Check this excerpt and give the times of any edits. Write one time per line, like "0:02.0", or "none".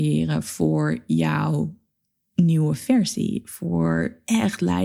none